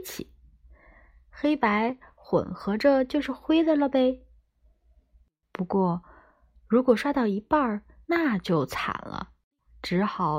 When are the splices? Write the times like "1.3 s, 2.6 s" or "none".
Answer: 8.0 s

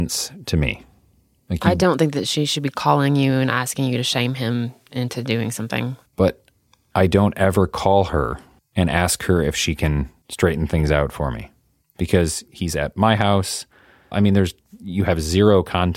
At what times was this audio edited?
6.0 s, 14.1 s

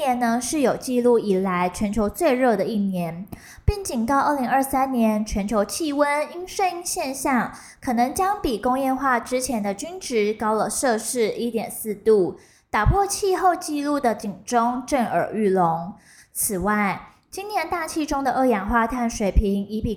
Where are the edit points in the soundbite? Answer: none

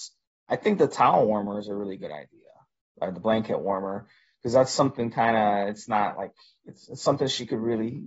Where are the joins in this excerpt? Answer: none

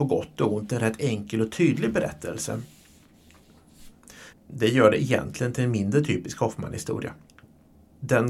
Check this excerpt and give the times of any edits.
4.3 s

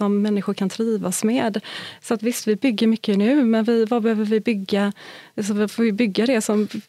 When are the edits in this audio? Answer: 2.0 s

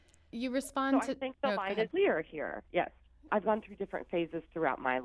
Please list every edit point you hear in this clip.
1.9 s, 3.3 s

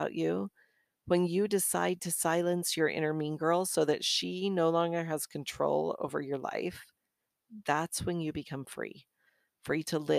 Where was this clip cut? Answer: none

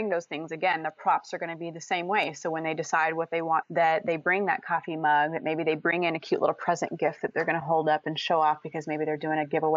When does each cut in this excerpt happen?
3.6 s

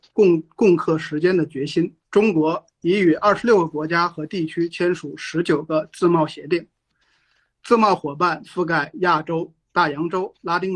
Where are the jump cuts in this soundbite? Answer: none

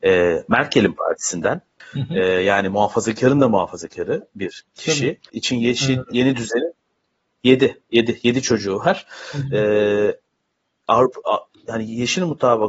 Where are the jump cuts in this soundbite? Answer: 1.8 s, 5.3 s

